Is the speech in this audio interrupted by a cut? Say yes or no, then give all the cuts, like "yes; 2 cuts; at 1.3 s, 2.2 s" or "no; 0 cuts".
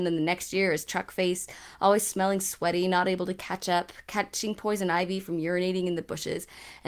no; 0 cuts